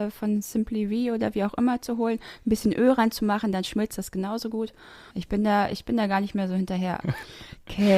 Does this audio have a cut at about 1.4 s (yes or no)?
no